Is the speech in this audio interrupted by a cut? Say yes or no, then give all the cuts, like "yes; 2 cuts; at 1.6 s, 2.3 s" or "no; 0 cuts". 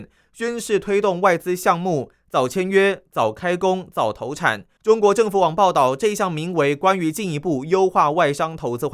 yes; 2 cuts; at 3.1 s, 4.8 s